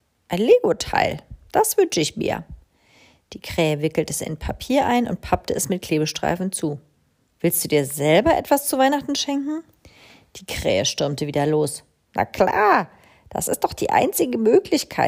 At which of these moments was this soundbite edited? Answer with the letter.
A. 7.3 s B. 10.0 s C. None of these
A